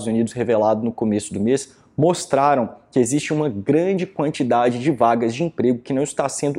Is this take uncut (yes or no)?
yes